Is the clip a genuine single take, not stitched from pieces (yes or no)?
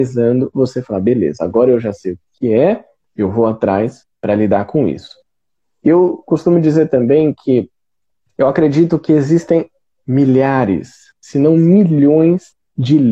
yes